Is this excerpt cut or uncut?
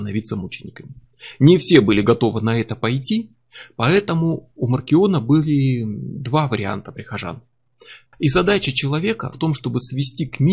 cut